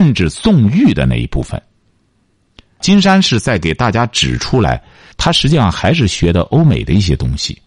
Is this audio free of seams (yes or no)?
no